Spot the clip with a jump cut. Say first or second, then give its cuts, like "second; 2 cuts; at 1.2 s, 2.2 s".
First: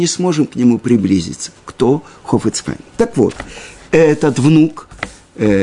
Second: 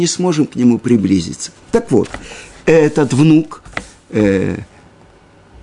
second; 1 cut; at 1.6 s